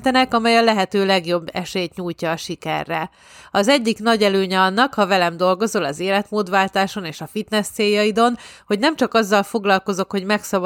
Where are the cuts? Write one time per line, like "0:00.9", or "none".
none